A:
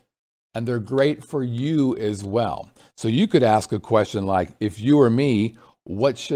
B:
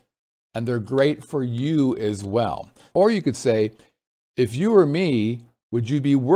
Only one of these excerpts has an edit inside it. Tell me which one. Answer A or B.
B